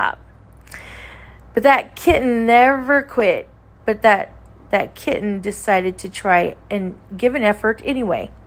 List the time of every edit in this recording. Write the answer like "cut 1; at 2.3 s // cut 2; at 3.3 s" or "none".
cut 1; at 3.8 s